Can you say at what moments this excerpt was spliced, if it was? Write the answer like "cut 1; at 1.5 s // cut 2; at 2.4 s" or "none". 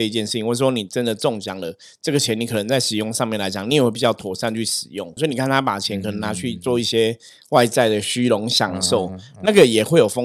cut 1; at 5.2 s